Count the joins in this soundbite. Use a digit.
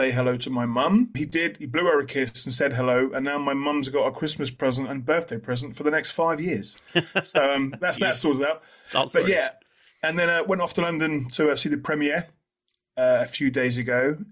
1